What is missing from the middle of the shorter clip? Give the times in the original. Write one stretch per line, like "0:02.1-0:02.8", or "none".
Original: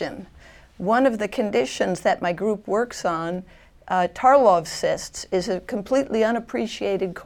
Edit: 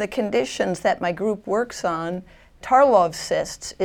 0:03.8-0:04.1